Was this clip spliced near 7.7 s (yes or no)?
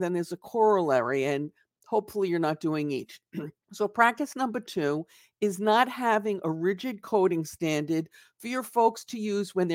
no